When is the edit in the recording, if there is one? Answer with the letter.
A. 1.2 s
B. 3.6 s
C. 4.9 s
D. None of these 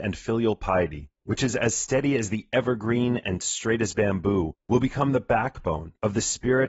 A